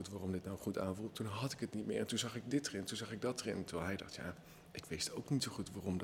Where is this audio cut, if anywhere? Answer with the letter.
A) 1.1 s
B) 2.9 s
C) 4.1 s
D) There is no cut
A